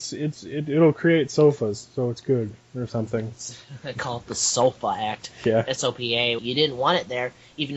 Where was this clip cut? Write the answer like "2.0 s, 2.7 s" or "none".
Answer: 6.4 s